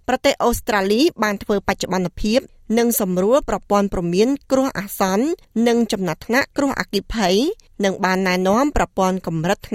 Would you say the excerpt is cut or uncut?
uncut